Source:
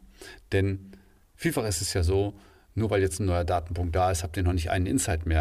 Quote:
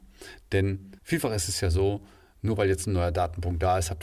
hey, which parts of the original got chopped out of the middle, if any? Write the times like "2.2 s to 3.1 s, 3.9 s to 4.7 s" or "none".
1.0 s to 1.3 s